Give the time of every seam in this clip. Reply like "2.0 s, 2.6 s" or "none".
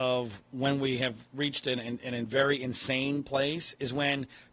none

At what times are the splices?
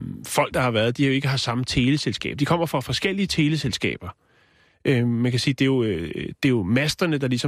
none

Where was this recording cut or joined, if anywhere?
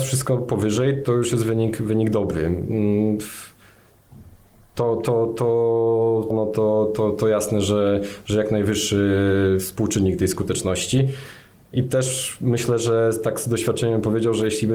6.3 s

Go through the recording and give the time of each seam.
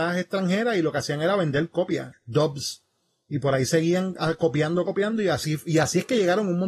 2.1 s, 4.8 s

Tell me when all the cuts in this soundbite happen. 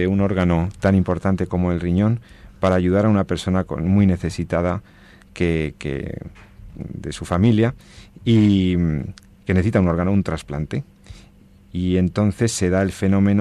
none

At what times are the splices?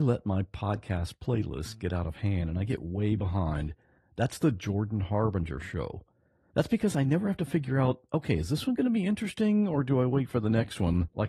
4.0 s

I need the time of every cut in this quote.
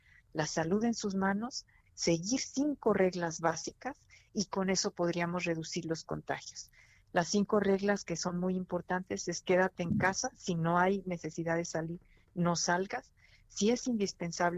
none

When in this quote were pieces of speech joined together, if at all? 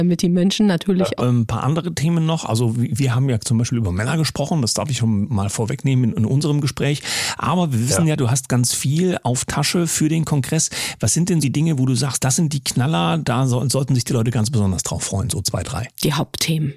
1.2 s, 11.4 s

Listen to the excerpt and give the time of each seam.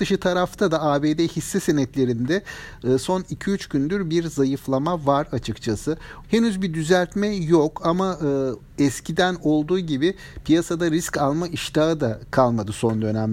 6.2 s

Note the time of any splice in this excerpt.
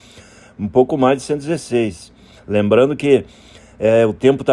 2.4 s

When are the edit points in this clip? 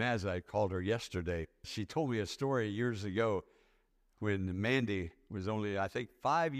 1.6 s

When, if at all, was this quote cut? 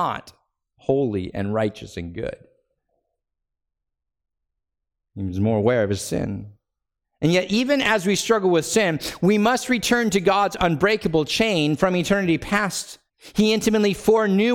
13.1 s

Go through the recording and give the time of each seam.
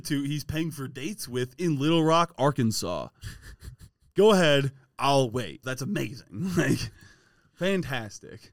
5.6 s

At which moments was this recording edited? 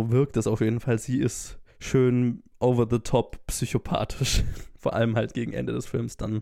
1.7 s

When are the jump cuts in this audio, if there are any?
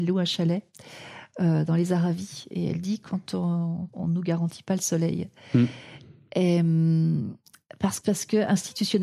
3.9 s, 8.0 s

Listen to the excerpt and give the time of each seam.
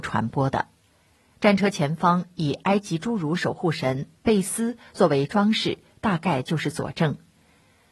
none

